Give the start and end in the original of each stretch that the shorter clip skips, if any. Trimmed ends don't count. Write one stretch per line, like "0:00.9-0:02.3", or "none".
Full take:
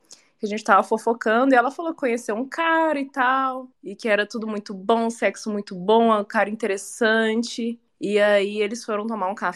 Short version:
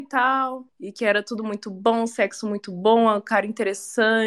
none